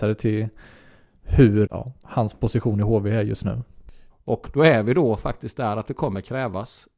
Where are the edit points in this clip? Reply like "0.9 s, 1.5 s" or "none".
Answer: 1.7 s, 4.1 s